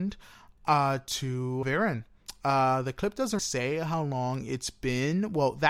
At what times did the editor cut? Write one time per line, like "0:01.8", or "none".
0:01.6
0:03.4